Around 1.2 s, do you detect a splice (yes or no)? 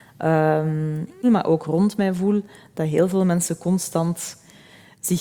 yes